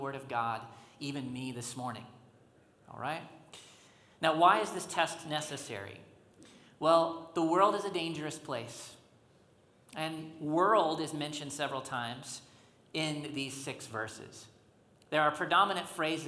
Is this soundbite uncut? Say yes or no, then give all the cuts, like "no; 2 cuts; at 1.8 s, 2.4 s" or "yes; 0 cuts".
yes; 0 cuts